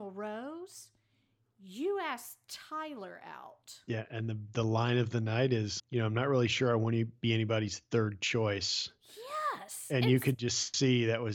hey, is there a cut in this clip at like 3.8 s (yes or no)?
no